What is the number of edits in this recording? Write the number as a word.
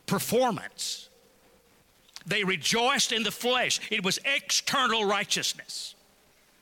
zero